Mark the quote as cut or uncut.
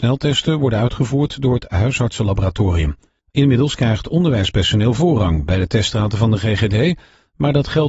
uncut